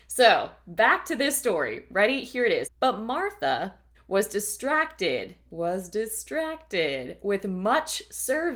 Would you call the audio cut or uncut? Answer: cut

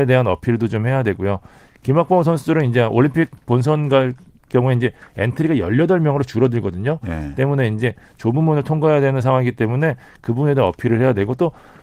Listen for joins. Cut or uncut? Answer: uncut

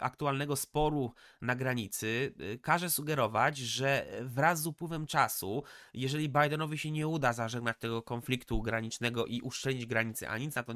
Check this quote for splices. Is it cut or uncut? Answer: uncut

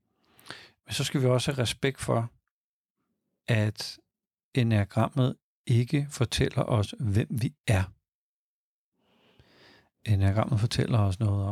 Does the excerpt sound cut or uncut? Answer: uncut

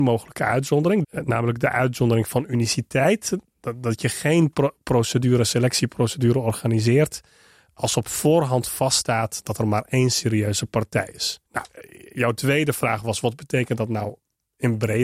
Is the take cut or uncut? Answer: cut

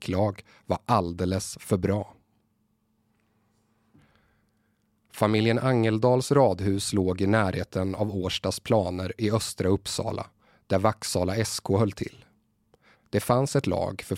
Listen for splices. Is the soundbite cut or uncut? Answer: cut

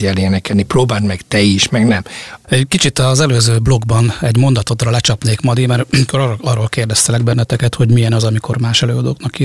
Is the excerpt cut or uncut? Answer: cut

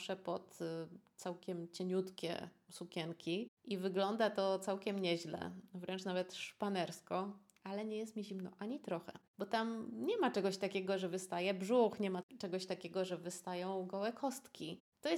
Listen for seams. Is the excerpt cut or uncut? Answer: cut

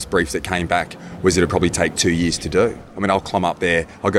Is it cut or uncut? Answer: uncut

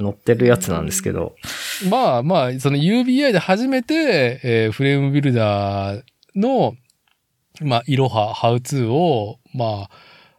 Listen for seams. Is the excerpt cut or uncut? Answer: uncut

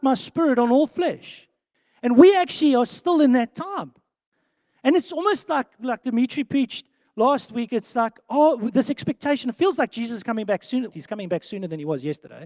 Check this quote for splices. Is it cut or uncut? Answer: cut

